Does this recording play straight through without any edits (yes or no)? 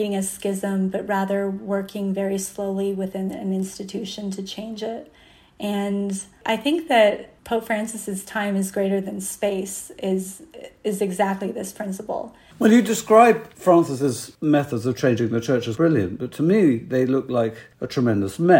no